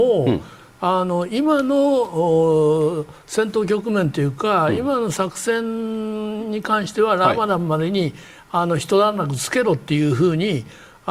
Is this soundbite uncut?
yes; 0 cuts

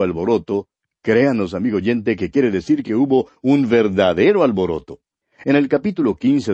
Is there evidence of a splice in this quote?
no; 0 cuts

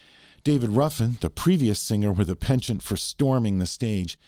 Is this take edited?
no; 0 cuts

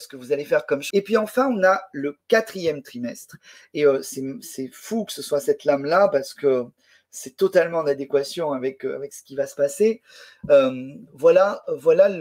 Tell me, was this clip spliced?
yes; 1 cut; at 0.9 s

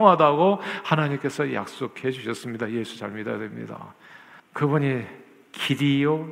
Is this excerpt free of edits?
no; 1 cut; at 4.4 s

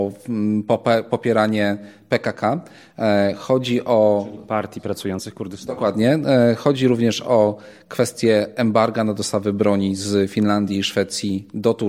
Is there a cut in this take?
no; 0 cuts

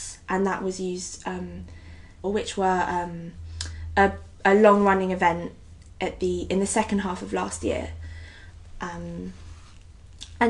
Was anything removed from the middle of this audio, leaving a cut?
yes; 1 cut; at 2.2 s

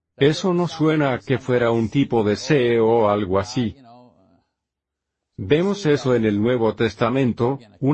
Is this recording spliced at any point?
no; 0 cuts

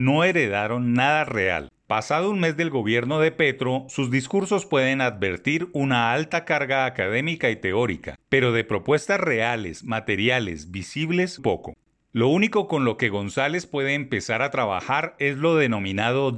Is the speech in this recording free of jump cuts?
no; 1 cut; at 11.4 s

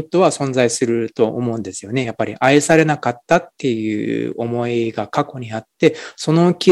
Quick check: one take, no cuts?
yes; 0 cuts

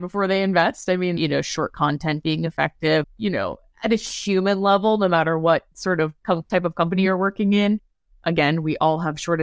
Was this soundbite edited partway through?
yes; 3 cuts; at 1.2 s, 3.0 s, 5.7 s

